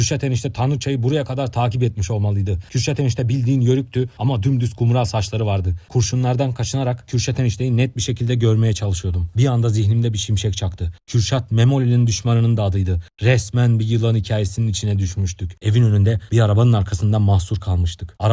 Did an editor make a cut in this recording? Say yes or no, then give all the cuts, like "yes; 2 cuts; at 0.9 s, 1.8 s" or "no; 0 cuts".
no; 0 cuts